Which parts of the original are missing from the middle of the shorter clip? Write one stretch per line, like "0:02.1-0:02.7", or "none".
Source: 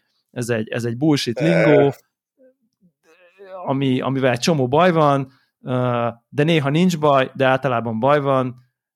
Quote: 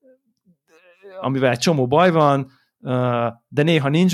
0:03.6-0:04.0